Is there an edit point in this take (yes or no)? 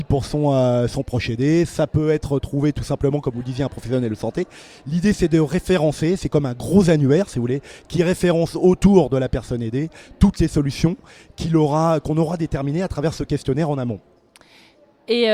no